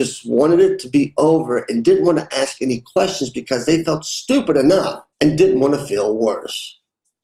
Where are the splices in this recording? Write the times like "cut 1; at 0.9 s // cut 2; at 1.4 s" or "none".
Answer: cut 1; at 5.1 s